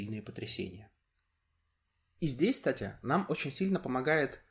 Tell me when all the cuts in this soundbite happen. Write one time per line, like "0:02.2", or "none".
none